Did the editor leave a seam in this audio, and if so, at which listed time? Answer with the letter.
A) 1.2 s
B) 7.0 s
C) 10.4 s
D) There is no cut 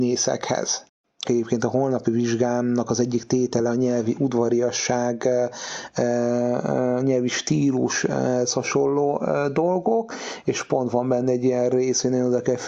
A